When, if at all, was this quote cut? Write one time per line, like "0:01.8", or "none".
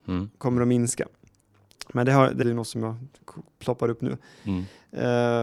0:02.4